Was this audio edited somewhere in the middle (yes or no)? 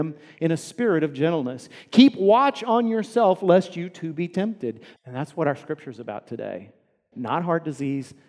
yes